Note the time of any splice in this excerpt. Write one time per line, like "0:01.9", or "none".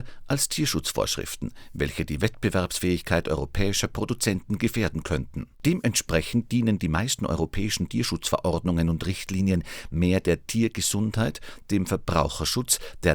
0:05.5

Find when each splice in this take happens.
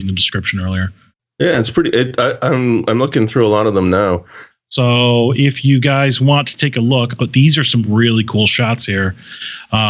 0:04.5
0:07.2

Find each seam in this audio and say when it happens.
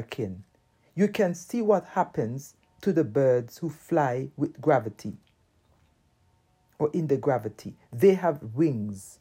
none

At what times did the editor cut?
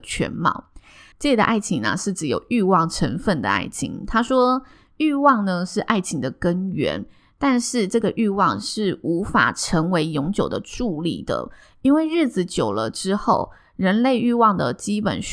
0:01.1

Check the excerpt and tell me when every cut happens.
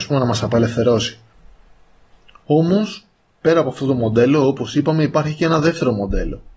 none

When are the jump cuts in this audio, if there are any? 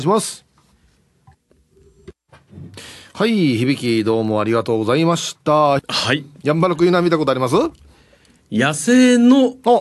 0:05.8

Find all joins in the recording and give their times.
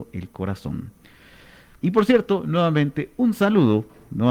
0:01.8

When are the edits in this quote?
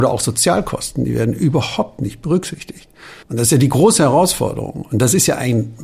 0:03.2

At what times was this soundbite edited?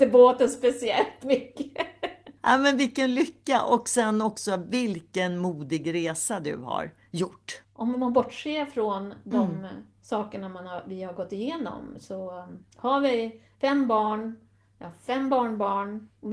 0:07.6

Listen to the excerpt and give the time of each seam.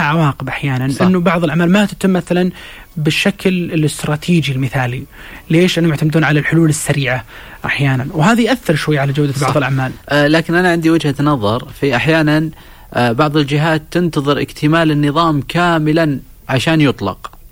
none

